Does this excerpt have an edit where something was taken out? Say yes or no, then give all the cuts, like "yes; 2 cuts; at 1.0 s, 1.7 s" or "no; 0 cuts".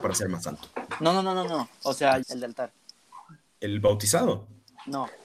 yes; 1 cut; at 2.2 s